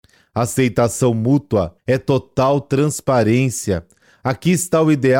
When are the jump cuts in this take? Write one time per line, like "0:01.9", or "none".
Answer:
0:01.8